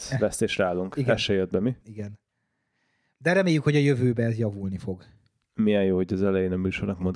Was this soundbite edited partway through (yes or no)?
yes